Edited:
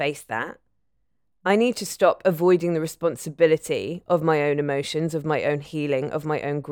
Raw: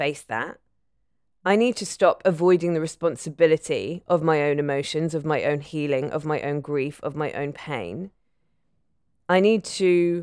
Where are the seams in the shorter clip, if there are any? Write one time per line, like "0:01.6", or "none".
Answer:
none